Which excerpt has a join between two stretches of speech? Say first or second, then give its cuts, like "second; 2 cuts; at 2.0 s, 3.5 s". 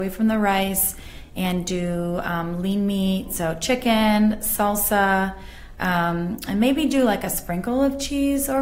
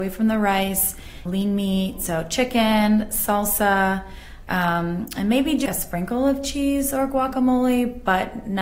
second; 2 cuts; at 1.3 s, 5.7 s